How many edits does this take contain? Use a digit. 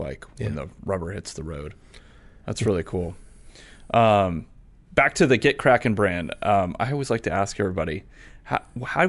0